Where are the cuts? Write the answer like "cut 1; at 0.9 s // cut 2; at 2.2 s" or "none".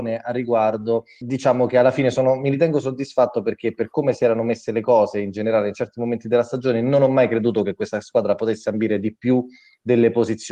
cut 1; at 1.2 s

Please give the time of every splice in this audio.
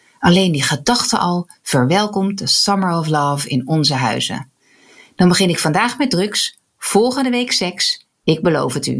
none

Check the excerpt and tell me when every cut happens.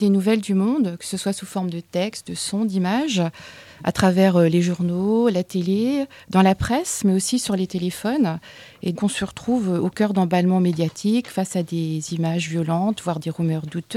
cut 1; at 9.0 s

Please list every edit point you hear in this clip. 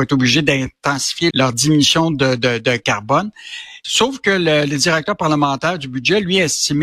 cut 1; at 1.3 s // cut 2; at 3.8 s

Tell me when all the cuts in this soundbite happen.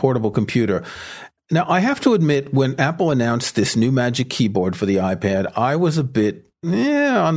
none

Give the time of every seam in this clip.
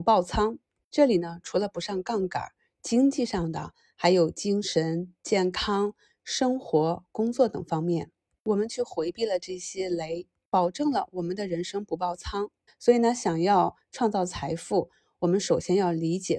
cut 1; at 12.7 s

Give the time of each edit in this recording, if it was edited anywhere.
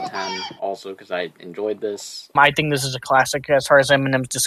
cut 1; at 2.3 s

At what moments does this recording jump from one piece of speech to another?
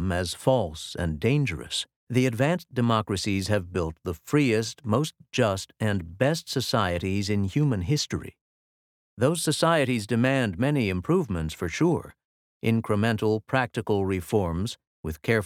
cut 1; at 2.0 s

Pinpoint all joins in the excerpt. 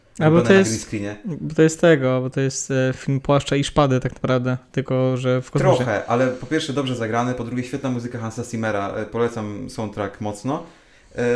none

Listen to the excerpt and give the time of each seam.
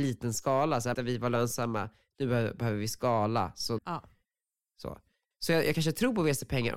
cut 1; at 0.9 s // cut 2; at 3.8 s // cut 3; at 5.3 s

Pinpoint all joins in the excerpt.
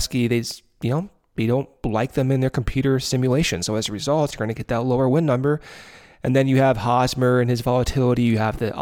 none

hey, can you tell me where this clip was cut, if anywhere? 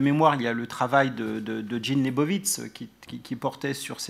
cut 1; at 3.1 s

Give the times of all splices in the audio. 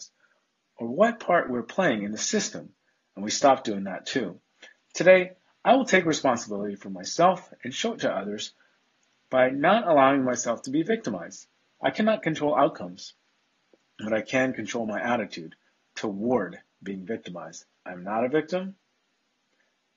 cut 1; at 4.8 s // cut 2; at 17.8 s

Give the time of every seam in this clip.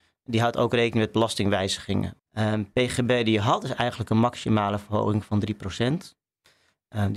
cut 1; at 2.2 s

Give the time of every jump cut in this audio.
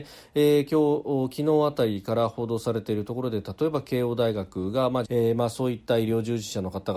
cut 1; at 5.0 s

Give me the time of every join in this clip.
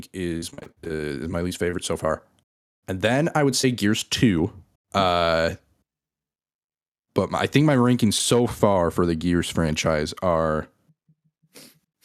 cut 1; at 4.8 s

